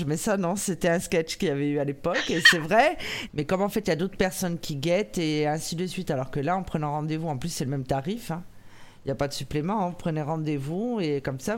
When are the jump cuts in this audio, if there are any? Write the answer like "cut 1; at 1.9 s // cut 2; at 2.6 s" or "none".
cut 1; at 3.3 s